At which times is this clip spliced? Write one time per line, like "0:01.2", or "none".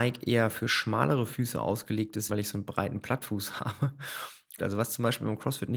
0:02.3
0:04.6